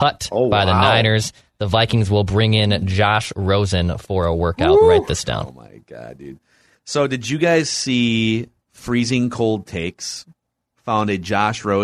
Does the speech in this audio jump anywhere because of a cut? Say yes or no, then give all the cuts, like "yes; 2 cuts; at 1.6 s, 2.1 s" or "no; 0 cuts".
no; 0 cuts